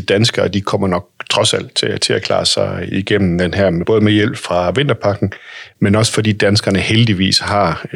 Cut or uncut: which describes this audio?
uncut